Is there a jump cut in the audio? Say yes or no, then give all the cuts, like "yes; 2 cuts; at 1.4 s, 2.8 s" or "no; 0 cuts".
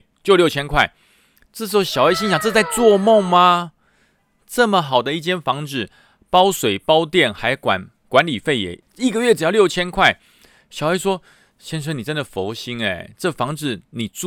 no; 0 cuts